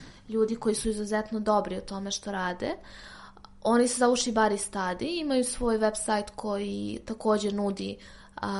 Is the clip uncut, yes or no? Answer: yes